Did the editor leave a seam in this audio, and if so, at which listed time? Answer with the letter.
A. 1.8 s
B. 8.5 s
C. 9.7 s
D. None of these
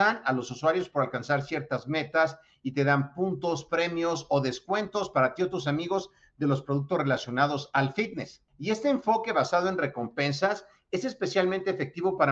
B